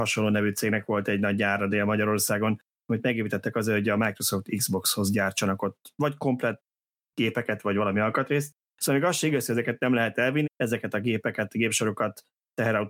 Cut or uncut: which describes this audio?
cut